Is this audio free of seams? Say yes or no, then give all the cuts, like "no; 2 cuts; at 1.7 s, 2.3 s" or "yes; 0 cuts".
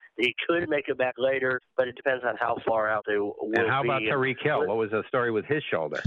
yes; 0 cuts